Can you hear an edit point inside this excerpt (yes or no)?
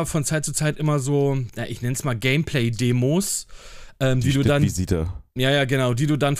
no